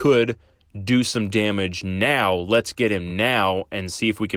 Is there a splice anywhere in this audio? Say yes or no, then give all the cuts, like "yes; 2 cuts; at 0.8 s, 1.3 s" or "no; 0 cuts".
no; 0 cuts